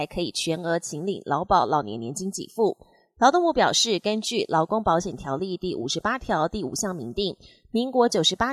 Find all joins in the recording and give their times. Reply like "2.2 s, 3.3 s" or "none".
none